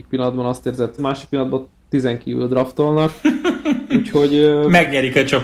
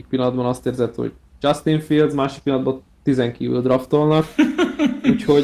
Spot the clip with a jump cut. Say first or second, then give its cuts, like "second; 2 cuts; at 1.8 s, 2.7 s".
first; 1 cut; at 1.0 s